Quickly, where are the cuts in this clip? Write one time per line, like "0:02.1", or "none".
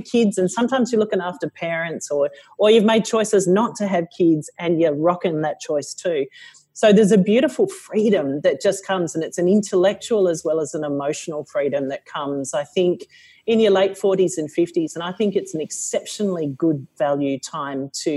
none